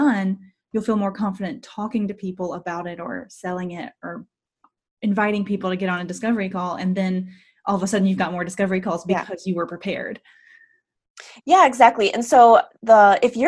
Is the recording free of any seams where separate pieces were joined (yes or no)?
yes